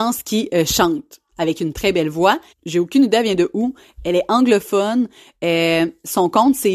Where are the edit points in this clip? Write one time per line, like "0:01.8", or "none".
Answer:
0:02.5